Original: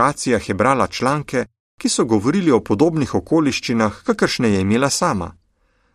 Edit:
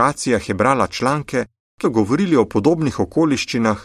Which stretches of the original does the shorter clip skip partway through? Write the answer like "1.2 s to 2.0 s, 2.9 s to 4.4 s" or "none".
1.8 s to 2.0 s